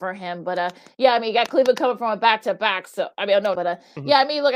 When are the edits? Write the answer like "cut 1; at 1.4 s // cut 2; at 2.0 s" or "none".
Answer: cut 1; at 3.6 s